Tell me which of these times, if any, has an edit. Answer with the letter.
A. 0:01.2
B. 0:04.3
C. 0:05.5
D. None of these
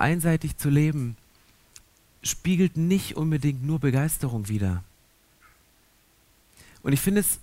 D